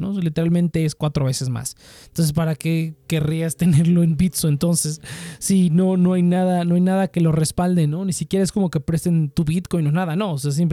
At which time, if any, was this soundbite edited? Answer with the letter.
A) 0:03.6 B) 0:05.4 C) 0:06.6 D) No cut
D